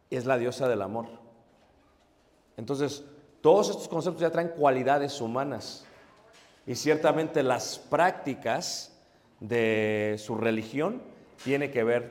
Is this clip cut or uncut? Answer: uncut